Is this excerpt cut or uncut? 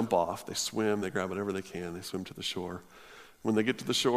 uncut